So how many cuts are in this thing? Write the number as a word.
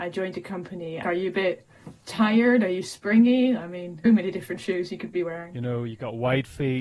two